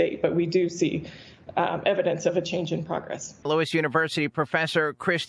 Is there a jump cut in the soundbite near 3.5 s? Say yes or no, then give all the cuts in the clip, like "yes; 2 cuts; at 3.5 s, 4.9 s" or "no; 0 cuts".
yes; 1 cut; at 3.5 s